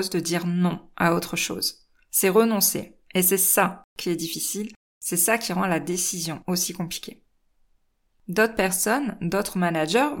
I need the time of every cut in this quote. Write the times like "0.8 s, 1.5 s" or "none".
none